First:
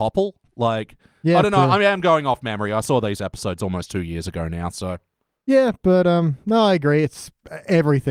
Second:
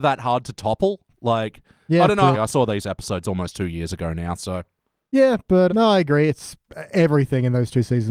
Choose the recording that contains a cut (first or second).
second